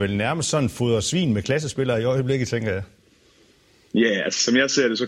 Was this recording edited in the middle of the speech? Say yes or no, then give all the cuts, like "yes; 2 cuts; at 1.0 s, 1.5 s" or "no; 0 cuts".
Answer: no; 0 cuts